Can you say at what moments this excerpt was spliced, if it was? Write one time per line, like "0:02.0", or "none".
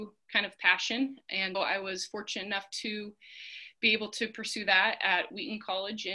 0:01.5